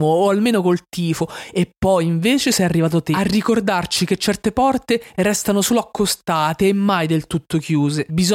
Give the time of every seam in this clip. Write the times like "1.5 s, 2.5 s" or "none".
none

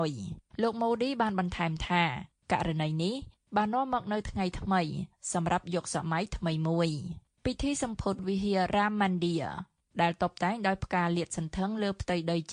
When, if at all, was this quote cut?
none

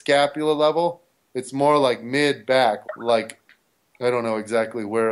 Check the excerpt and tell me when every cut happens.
2.8 s

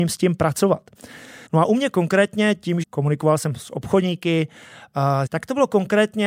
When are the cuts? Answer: 1.5 s, 2.8 s, 5.3 s

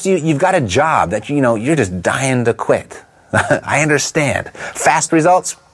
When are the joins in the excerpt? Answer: none

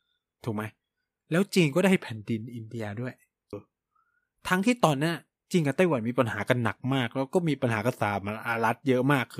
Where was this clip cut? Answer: 3.5 s

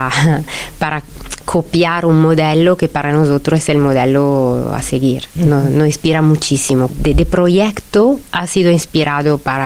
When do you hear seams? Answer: 5.3 s, 6.9 s

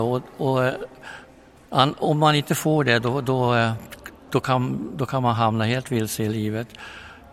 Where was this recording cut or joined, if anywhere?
none

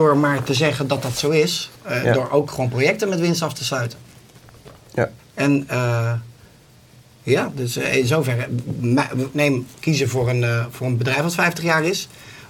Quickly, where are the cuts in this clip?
1.7 s, 5.2 s, 9.3 s

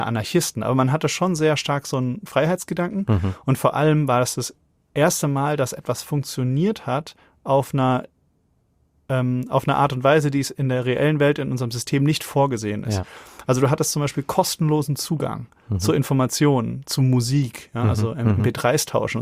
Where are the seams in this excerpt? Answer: none

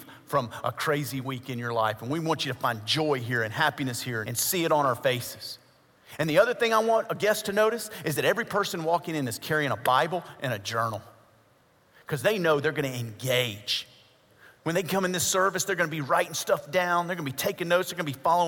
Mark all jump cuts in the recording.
4.2 s

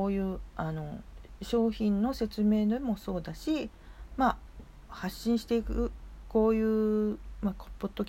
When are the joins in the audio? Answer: 4.6 s

